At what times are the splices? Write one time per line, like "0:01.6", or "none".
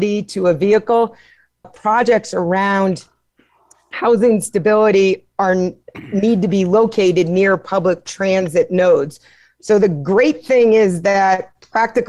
0:01.6